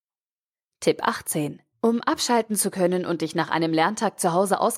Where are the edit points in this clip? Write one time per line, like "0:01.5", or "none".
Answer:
0:01.7